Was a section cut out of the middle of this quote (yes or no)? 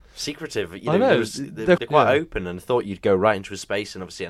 yes